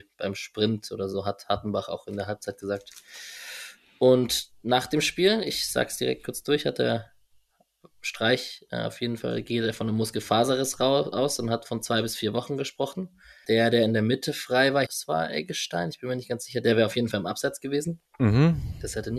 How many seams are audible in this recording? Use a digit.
2